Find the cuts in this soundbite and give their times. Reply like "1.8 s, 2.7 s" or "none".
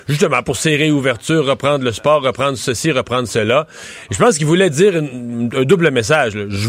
none